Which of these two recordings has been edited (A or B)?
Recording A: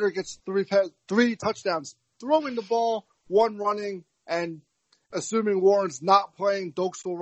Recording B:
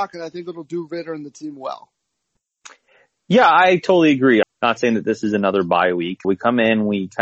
B